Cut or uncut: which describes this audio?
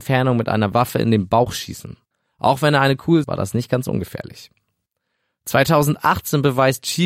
cut